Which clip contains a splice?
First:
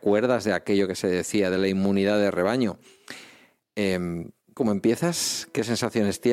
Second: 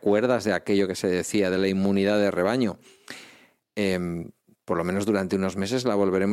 first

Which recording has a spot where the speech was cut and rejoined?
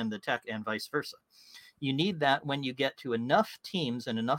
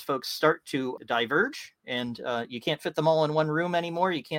second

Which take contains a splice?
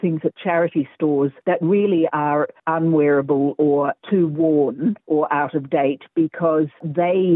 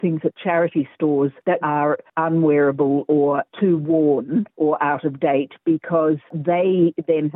second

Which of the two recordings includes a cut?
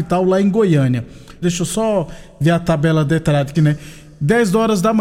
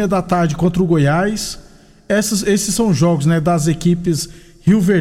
first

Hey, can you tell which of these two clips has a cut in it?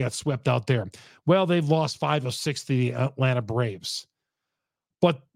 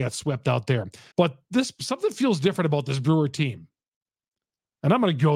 second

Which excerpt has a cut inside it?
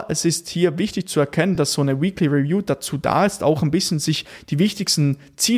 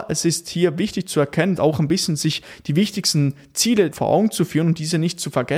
second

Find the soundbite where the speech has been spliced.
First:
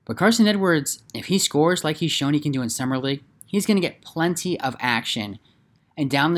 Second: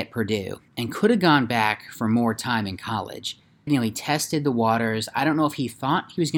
second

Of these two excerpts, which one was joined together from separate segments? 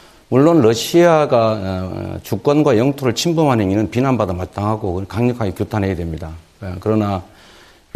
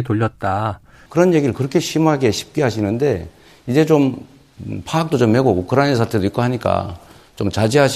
second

